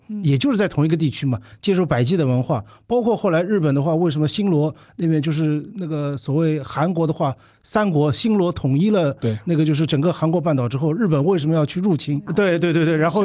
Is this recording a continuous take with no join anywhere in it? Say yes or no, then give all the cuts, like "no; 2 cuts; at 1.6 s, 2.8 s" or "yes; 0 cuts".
no; 1 cut; at 12.3 s